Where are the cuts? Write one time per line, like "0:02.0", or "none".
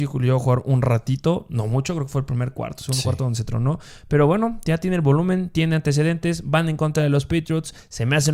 none